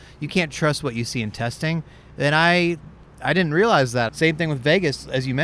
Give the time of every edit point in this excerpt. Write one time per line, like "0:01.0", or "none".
0:04.1